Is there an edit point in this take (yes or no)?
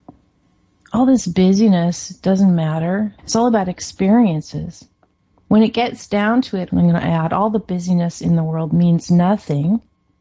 yes